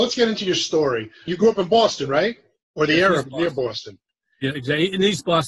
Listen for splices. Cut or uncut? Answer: cut